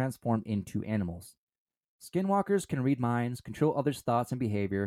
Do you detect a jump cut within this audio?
no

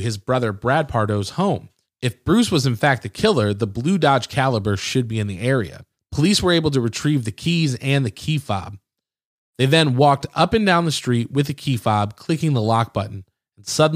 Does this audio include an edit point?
no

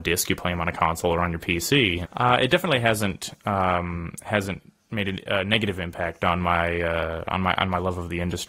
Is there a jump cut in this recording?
yes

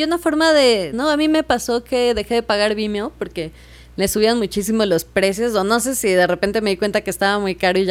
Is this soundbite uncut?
no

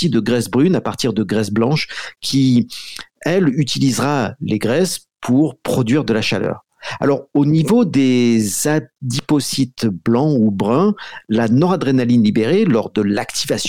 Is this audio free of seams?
yes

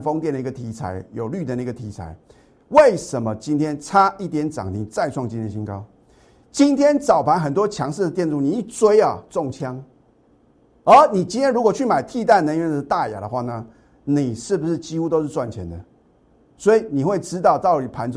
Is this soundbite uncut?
yes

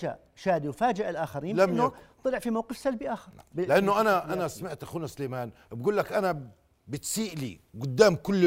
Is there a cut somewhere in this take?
yes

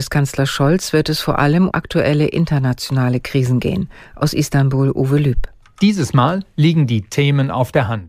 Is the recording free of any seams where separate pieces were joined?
no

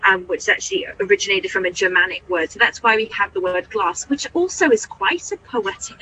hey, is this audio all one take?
yes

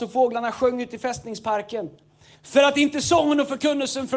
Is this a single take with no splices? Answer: no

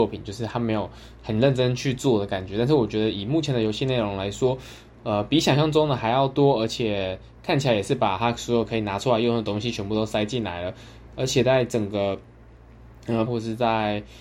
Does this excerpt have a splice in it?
yes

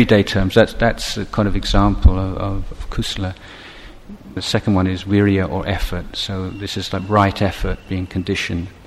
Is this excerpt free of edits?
no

